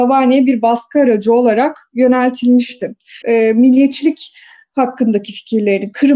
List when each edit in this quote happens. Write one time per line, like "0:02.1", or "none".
0:03.2